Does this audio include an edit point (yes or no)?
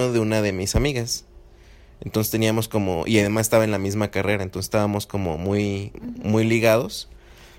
no